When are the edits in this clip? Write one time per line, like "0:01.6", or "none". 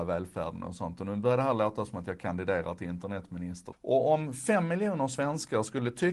0:03.7